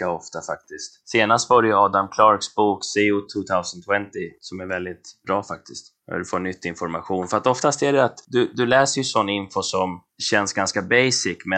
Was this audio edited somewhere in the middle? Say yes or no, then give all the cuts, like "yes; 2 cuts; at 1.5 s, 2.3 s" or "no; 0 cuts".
no; 0 cuts